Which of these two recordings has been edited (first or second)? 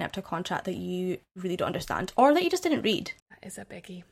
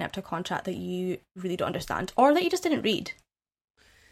first